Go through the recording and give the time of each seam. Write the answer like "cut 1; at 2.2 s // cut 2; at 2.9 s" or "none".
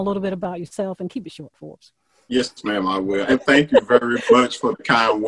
none